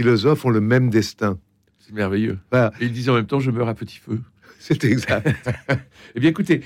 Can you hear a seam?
no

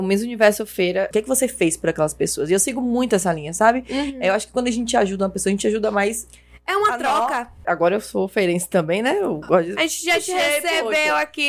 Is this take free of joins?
no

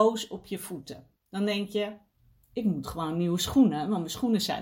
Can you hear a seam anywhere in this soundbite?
yes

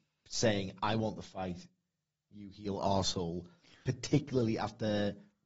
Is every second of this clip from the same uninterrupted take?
yes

